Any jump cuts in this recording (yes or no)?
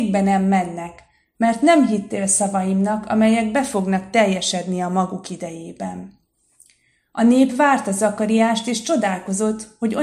no